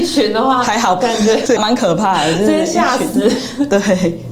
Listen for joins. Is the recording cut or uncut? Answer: cut